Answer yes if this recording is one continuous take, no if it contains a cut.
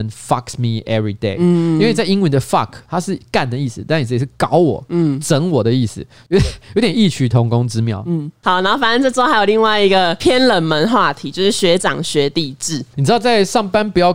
no